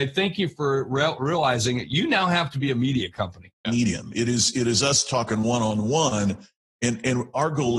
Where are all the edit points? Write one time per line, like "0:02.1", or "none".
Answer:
0:03.6